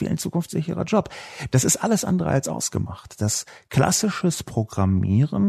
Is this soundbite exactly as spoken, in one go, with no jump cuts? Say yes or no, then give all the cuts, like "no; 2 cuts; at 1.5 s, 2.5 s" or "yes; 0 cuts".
yes; 0 cuts